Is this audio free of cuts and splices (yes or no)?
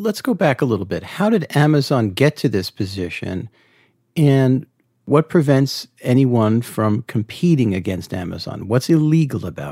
yes